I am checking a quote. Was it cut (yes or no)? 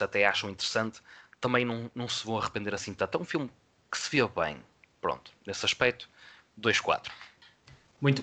no